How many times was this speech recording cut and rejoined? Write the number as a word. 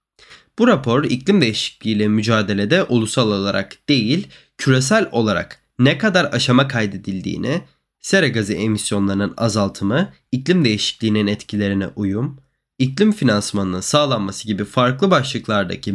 zero